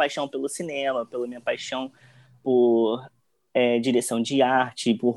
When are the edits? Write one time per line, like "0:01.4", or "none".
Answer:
none